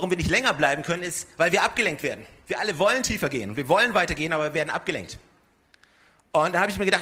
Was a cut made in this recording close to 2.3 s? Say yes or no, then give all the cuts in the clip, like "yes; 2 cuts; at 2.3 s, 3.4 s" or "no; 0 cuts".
no; 0 cuts